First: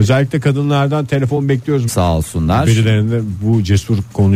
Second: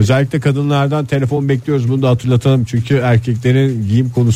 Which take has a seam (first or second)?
first